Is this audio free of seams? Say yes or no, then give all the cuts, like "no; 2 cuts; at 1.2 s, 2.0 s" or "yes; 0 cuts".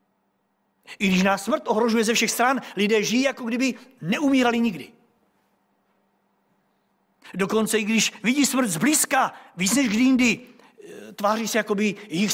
yes; 0 cuts